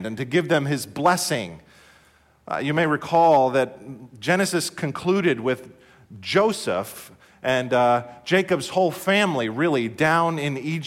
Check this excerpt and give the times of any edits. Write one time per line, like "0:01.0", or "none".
none